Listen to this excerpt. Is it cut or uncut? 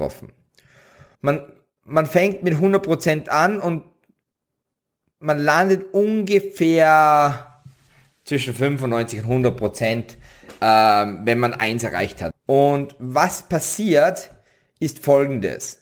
cut